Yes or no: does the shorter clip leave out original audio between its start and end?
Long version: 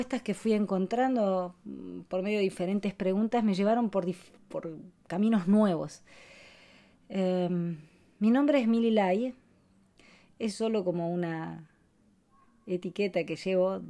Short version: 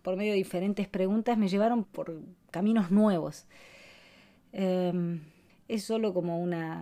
yes